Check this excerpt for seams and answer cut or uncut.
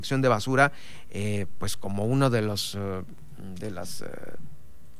uncut